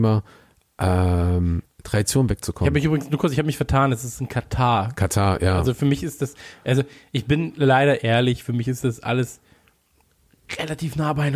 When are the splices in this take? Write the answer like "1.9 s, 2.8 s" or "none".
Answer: none